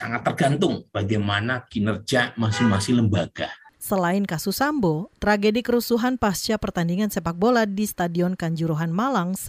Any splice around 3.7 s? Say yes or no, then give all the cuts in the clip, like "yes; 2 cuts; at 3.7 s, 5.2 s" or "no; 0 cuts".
yes; 1 cut; at 3.7 s